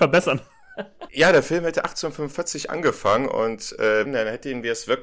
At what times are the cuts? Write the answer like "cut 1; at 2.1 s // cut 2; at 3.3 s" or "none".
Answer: cut 1; at 1.1 s // cut 2; at 4.0 s